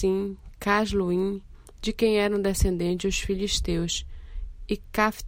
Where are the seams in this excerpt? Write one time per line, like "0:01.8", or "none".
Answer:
none